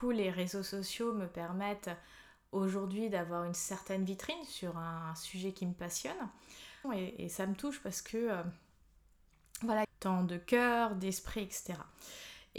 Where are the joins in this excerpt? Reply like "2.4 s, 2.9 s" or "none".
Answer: 6.8 s, 9.8 s

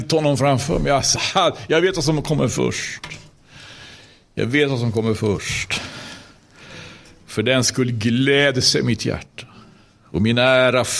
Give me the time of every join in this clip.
1.2 s

